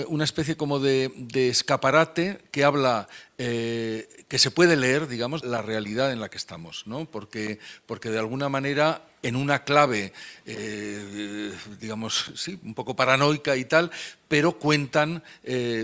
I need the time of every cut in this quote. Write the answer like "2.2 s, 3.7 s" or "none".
5.4 s

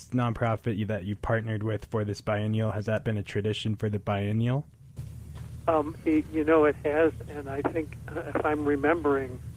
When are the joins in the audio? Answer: none

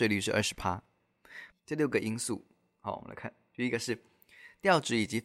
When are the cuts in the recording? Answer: 1.5 s

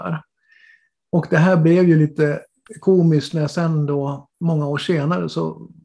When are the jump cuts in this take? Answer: 4.3 s

